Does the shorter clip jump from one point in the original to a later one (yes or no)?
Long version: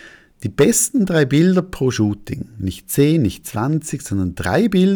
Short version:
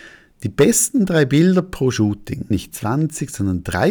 yes